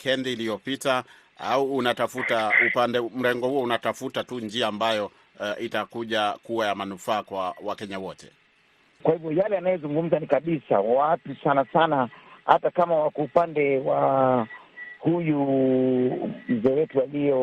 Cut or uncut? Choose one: cut